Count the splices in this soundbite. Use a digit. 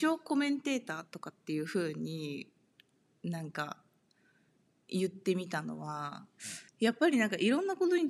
1